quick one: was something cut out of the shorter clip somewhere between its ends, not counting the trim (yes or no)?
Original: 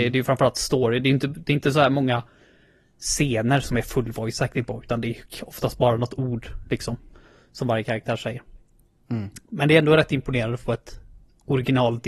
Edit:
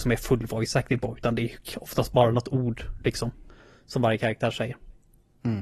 no